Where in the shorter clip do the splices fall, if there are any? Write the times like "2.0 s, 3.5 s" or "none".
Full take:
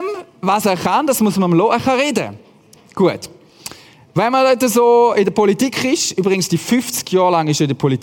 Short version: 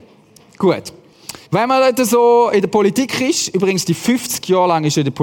1.5 s